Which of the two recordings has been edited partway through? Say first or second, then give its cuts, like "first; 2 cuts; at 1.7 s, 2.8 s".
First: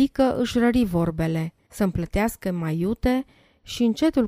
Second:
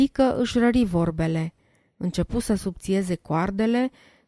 first; 1 cut; at 1.7 s